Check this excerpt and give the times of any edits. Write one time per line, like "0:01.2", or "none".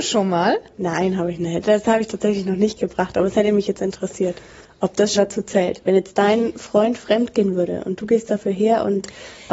0:05.2